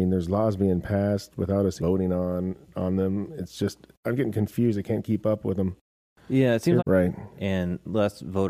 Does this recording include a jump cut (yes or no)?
yes